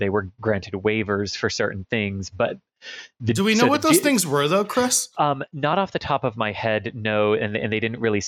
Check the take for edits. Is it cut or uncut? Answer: uncut